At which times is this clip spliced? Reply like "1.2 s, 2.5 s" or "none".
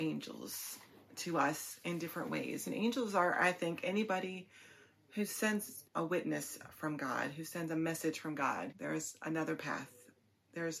5.9 s, 8.7 s

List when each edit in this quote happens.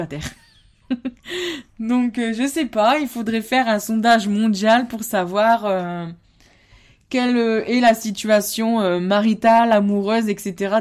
none

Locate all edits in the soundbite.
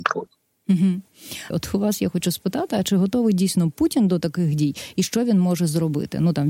1.5 s

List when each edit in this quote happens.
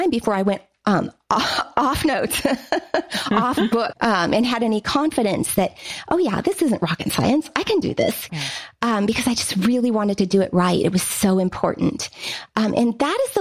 3.9 s, 8.3 s

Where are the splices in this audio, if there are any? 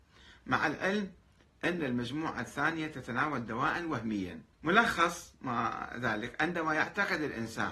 4.5 s

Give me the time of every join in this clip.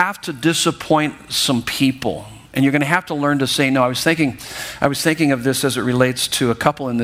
none

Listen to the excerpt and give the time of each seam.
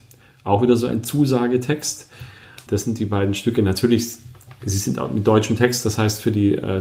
2.7 s

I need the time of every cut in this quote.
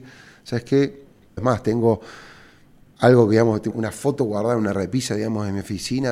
1.4 s, 3.7 s

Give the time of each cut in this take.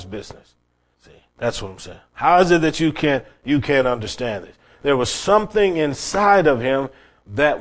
0.9 s

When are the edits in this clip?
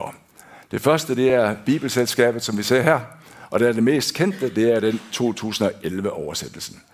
none

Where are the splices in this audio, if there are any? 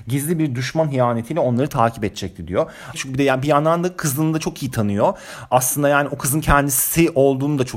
2.9 s

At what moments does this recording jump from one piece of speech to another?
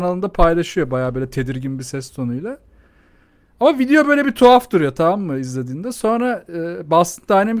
none

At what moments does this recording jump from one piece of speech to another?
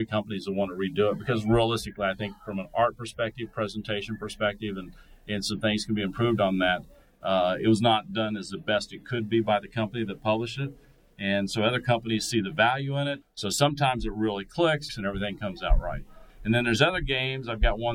13.2 s, 14.9 s

